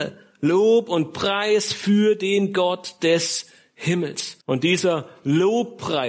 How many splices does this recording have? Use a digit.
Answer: 1